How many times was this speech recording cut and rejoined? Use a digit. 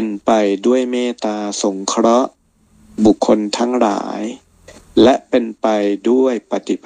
1